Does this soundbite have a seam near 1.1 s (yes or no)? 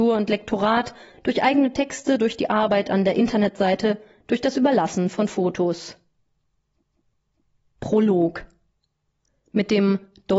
yes